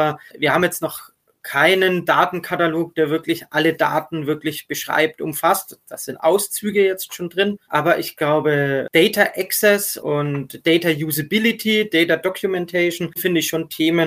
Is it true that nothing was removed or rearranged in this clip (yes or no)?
no